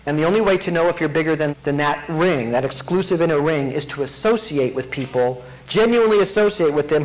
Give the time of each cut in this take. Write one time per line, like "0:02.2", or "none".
0:01.5

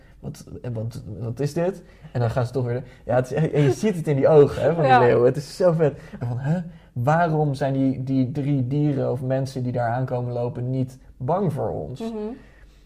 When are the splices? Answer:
0:06.2

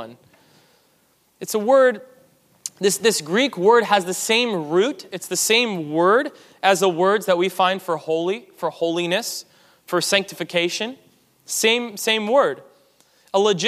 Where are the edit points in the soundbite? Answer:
none

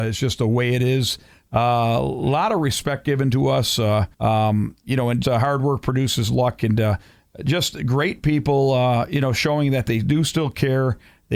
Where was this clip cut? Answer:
0:04.1
0:05.2

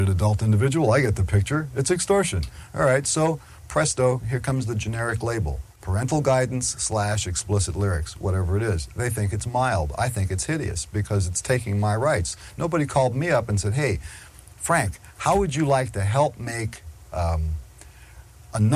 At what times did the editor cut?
none

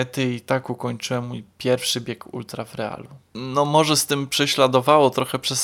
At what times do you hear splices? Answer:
0:03.3

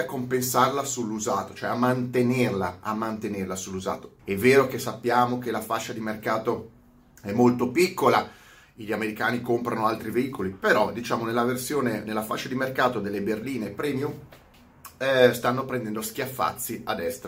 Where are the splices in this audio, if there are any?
0:04.2

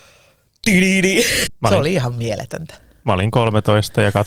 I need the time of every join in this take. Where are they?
0:01.5

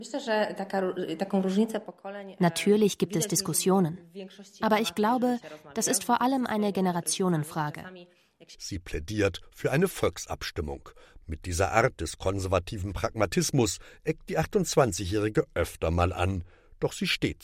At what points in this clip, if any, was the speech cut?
0:08.5
0:11.2

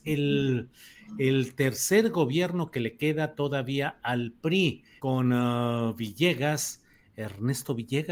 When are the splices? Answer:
0:05.0

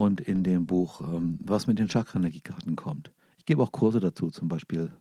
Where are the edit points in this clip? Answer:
none

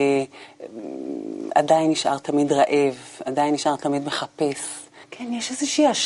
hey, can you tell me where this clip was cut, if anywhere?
0:05.0

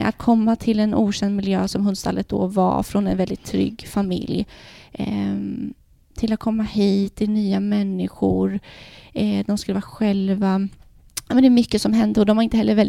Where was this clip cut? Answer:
none

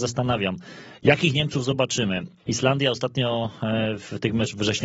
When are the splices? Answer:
none

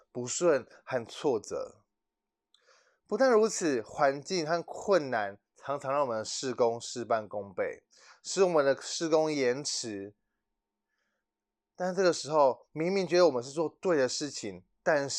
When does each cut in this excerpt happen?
none

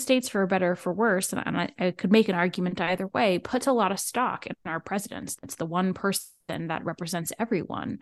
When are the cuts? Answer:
0:05.4

